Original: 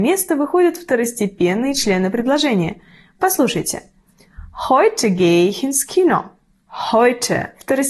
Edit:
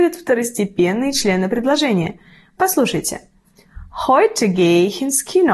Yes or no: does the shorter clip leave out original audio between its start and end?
no